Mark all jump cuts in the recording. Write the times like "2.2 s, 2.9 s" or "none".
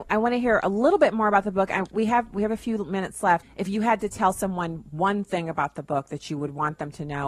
3.4 s

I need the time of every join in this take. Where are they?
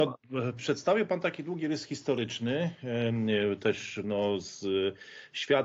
none

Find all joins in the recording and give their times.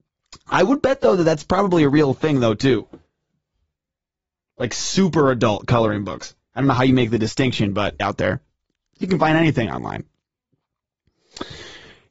8.0 s

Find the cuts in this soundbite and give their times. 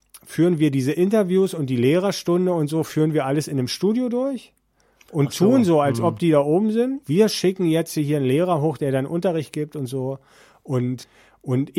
7.0 s

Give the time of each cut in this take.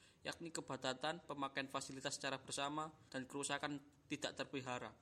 1.2 s, 3.1 s

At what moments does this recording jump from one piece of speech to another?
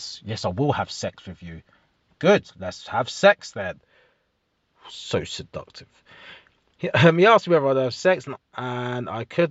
none

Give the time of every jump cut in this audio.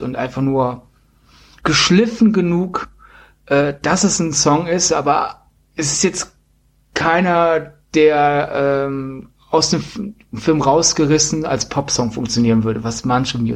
none

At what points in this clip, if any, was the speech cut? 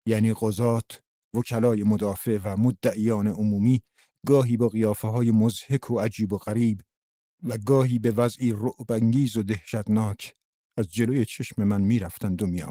1.2 s

